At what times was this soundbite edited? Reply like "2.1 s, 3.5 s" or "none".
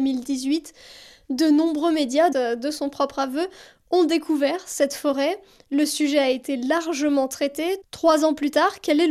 2.3 s